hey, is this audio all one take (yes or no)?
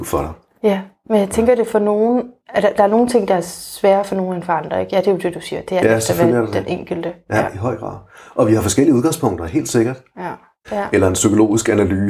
no